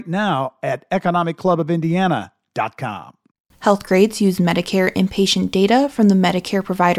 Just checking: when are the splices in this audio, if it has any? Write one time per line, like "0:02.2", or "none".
0:03.5